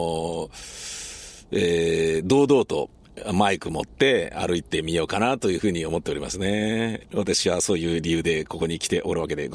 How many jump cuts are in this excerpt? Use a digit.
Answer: 1